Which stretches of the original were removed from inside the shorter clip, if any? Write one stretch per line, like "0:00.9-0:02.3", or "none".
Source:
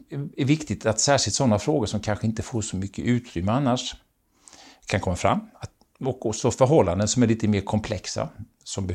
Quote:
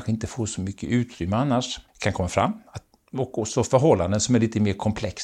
0:04.0-0:04.8